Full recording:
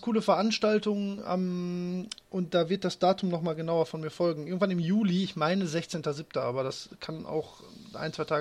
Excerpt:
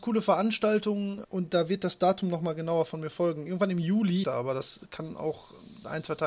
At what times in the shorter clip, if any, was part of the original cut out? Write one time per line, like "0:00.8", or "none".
0:01.2
0:04.2